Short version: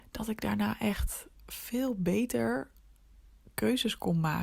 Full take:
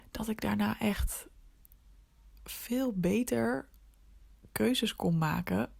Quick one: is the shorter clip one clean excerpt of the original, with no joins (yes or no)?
no